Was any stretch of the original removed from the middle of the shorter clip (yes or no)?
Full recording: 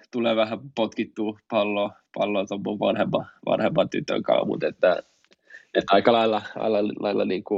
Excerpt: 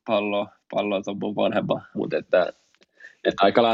yes